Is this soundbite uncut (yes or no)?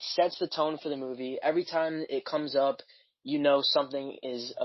yes